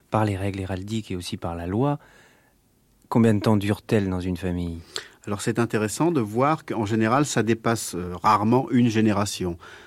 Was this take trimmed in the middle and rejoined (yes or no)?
no